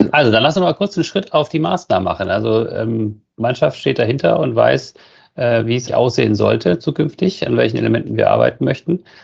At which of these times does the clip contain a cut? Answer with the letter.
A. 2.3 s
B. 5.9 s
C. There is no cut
B